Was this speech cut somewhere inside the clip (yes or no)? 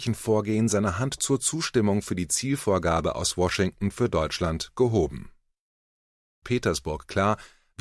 yes